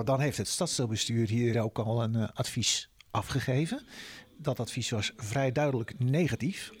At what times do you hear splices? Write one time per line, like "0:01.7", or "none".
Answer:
0:01.5